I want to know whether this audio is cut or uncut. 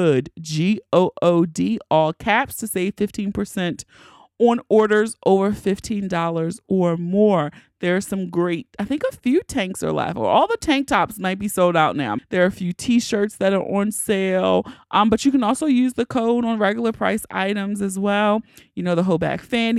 cut